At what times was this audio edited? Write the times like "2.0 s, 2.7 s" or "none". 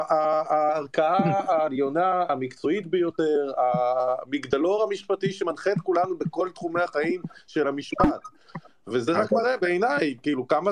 8.7 s

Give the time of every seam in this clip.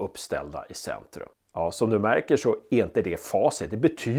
none

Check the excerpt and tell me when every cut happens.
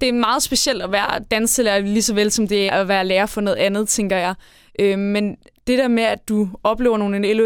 2.7 s

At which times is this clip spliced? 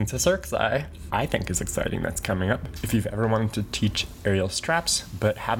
1.1 s

